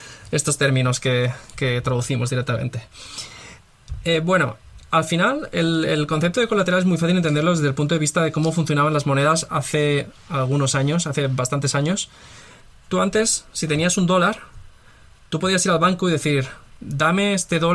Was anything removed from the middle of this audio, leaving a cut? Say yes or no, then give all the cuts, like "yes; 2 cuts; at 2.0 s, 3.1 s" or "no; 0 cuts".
no; 0 cuts